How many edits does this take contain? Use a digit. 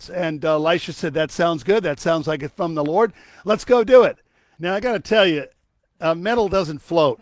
2